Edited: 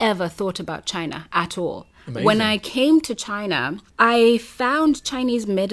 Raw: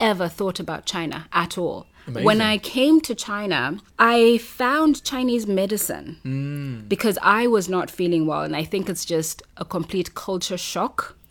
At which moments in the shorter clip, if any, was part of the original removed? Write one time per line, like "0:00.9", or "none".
none